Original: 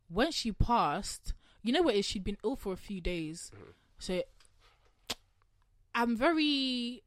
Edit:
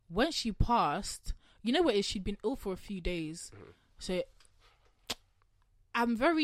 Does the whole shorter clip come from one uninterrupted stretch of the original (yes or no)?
yes